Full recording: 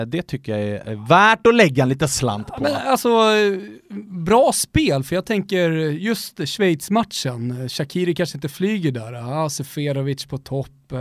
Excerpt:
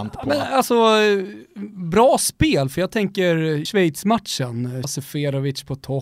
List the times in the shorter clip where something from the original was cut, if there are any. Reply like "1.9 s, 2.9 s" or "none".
3.7 s, 4.8 s